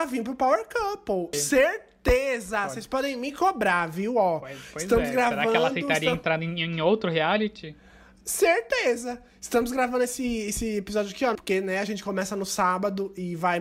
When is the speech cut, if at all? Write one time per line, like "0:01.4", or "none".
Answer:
0:01.3
0:11.4

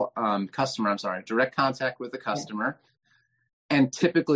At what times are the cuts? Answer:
none

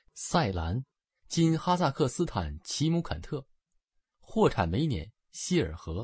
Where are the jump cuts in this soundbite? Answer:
none

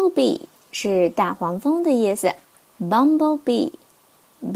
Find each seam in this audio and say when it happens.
none

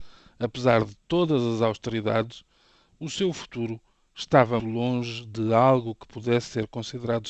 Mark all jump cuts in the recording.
0:04.6

